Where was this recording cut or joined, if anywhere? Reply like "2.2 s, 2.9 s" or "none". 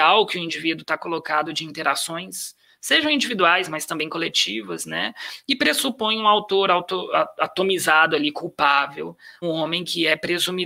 9.4 s